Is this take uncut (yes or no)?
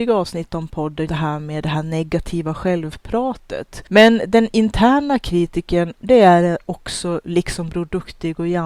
no